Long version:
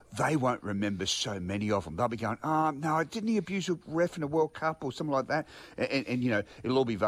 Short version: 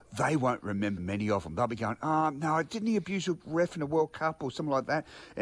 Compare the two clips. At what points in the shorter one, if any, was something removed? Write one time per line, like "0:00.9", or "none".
0:01.0